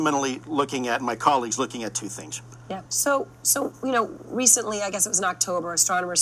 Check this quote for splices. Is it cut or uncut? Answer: cut